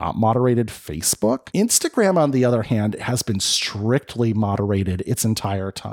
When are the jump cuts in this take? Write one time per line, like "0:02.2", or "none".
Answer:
none